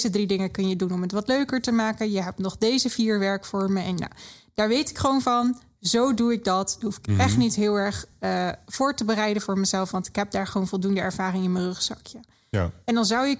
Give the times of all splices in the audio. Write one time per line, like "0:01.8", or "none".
none